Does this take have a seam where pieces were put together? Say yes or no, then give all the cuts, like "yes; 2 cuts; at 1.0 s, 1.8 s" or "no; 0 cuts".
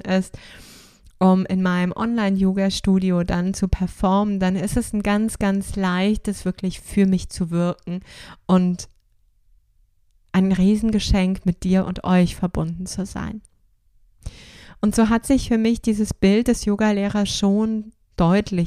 no; 0 cuts